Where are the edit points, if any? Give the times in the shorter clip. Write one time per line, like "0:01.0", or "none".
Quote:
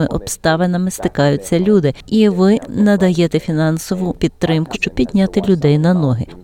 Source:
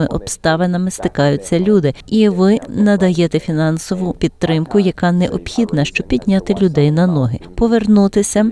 0:04.7